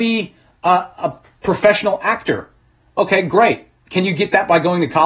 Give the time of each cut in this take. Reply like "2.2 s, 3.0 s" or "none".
none